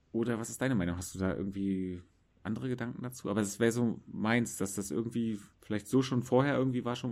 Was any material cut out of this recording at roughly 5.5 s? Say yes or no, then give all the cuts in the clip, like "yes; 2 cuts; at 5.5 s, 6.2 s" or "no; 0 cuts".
yes; 1 cut; at 5.5 s